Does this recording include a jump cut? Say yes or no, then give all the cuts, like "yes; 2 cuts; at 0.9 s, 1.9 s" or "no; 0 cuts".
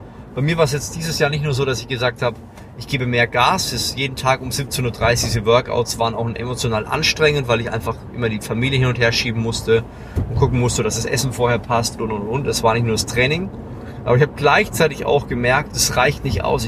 yes; 2 cuts; at 12.0 s, 15.7 s